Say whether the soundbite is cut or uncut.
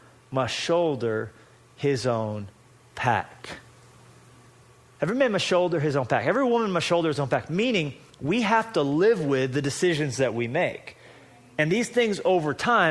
uncut